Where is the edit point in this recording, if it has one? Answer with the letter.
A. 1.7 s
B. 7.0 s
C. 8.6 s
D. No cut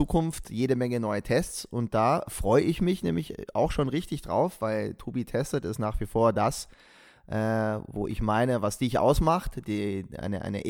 D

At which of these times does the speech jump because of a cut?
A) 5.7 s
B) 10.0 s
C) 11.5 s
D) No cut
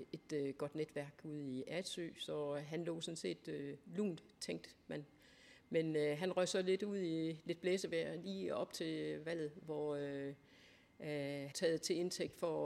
C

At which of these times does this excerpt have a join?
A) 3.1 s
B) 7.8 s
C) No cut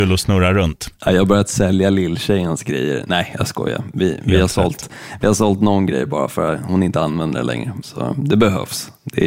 B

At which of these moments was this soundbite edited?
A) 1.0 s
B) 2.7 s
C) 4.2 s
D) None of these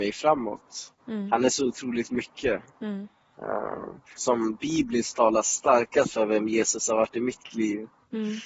C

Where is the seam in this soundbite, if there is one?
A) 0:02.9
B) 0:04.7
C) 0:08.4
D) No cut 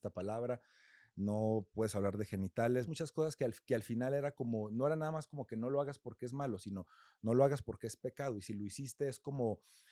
A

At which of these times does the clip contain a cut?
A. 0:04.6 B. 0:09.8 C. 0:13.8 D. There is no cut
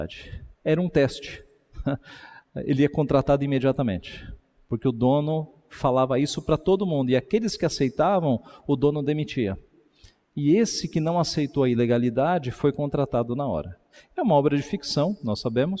D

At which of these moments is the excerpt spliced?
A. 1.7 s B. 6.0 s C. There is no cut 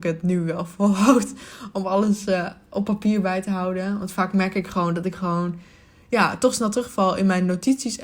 C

